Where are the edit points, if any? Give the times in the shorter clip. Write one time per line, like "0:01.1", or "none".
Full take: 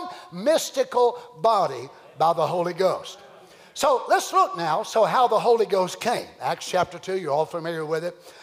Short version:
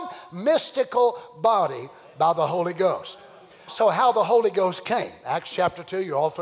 0:03.7